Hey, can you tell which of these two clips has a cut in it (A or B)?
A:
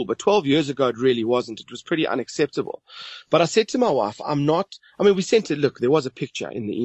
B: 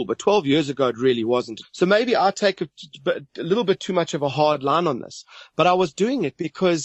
B